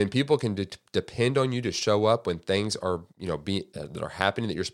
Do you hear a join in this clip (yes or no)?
yes